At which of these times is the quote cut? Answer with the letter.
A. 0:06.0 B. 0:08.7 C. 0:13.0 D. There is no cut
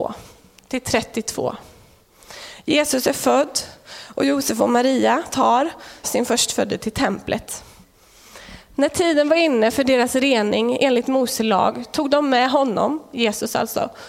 A